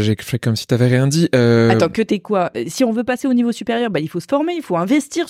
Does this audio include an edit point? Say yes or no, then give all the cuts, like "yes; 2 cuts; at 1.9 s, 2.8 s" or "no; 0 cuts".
no; 0 cuts